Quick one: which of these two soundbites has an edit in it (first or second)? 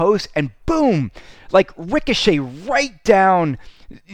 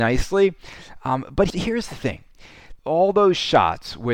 second